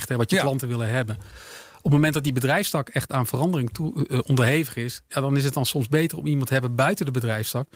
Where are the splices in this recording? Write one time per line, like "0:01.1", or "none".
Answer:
0:04.1

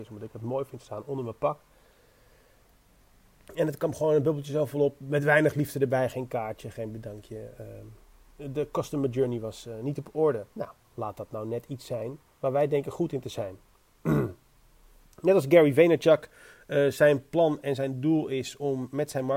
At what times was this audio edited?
0:10.5

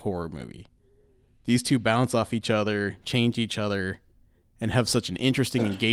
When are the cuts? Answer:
none

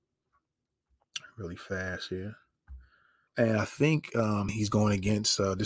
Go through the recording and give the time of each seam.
0:03.3
0:04.5

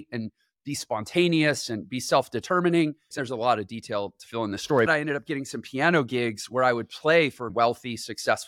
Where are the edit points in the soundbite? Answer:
0:03.1
0:04.9
0:07.5

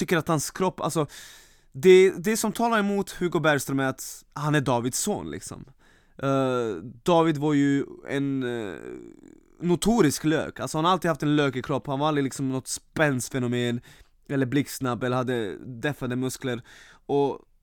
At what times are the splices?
none

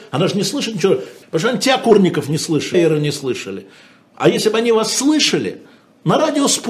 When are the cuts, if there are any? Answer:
0:01.2
0:02.7

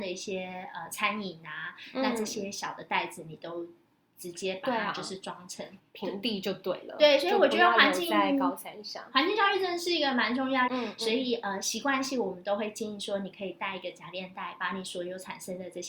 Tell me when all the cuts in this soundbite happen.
0:05.8
0:10.7

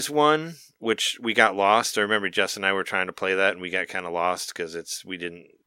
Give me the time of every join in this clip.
none

